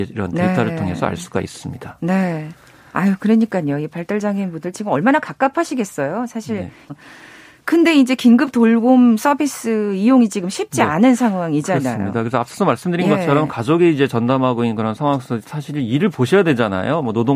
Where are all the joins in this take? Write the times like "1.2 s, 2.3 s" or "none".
6.9 s